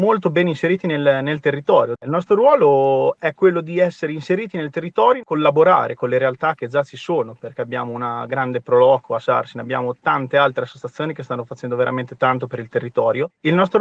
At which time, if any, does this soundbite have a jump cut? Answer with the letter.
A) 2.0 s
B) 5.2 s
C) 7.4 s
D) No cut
A